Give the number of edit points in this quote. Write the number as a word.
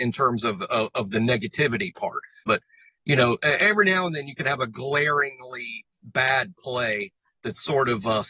two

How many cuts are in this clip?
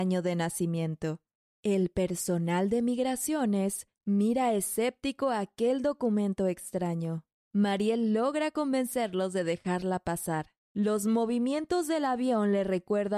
two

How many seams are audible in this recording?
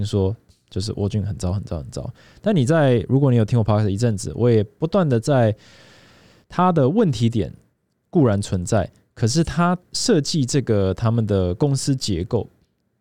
two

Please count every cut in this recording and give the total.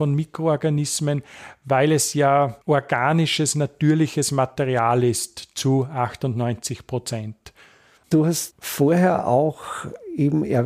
one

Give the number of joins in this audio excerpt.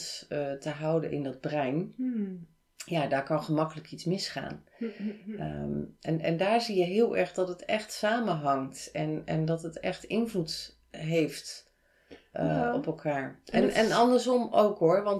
zero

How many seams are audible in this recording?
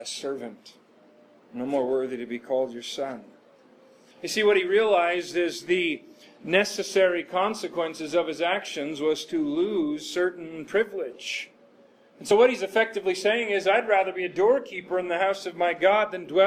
zero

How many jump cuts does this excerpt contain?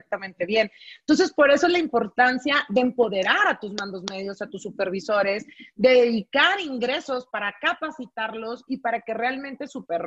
zero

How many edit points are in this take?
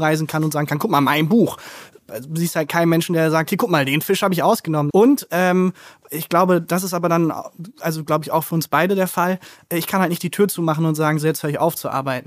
one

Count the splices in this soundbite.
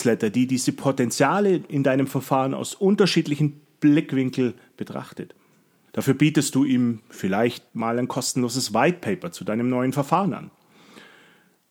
two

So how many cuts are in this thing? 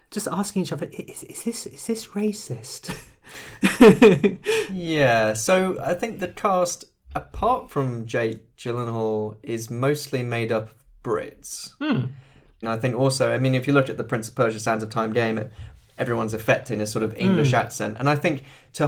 one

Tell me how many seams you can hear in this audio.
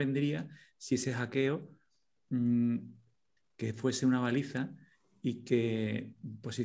one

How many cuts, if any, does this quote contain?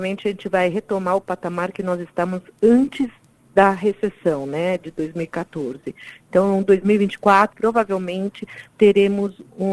one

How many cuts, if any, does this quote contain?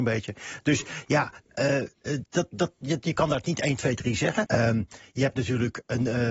one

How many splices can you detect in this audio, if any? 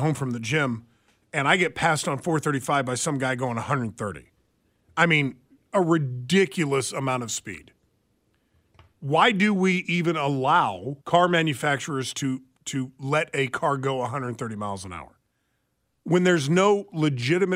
one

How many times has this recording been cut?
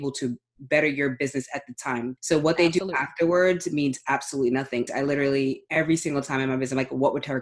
two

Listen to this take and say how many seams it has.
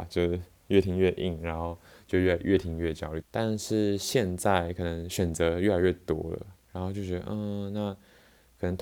one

